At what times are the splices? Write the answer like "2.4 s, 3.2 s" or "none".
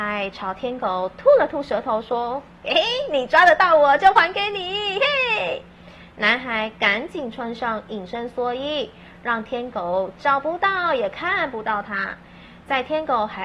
none